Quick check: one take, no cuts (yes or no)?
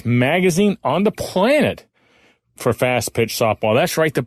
yes